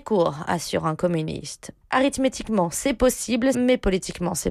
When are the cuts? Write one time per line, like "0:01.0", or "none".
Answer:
0:01.8
0:03.5